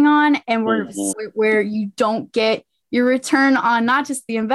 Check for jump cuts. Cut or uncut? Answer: cut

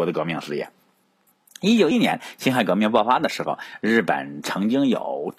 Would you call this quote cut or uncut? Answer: cut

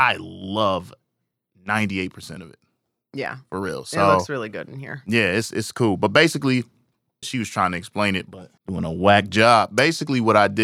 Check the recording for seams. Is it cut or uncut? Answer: cut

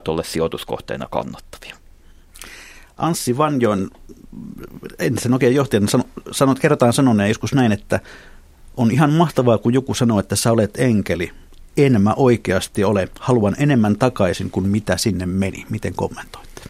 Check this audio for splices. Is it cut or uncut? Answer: uncut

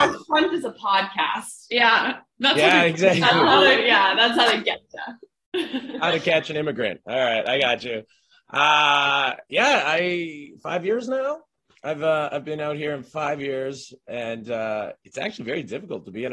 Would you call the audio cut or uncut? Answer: uncut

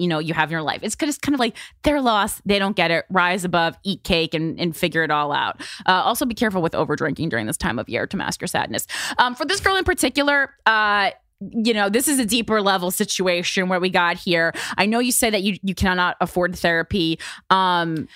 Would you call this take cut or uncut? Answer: uncut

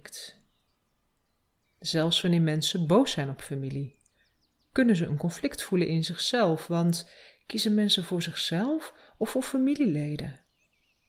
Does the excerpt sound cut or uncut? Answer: uncut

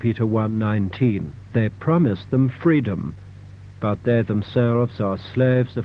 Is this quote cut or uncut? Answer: uncut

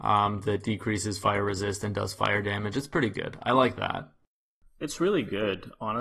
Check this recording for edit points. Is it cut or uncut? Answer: uncut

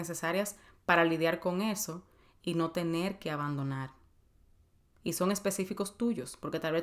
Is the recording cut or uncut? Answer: uncut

